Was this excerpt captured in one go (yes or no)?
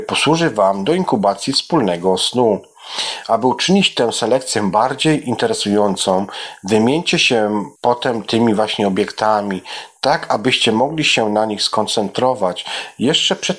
no